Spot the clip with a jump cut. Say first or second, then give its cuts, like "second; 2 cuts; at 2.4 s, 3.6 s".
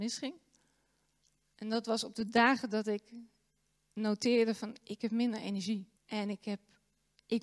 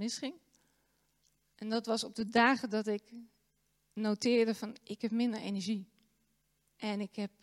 first; 1 cut; at 6.0 s